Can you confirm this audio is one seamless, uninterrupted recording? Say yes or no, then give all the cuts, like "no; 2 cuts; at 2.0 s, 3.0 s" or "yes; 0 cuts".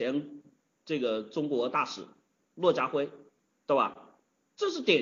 yes; 0 cuts